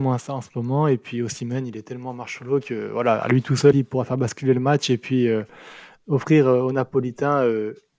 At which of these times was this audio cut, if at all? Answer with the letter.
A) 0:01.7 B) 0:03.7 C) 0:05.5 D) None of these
B